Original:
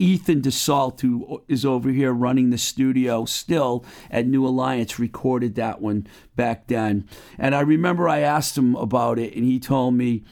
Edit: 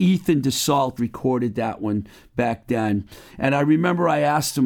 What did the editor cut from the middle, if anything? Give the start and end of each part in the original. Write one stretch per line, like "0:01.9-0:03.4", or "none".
0:01.0-0:05.0